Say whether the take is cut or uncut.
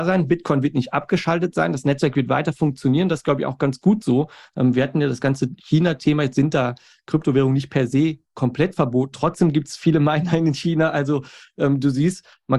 cut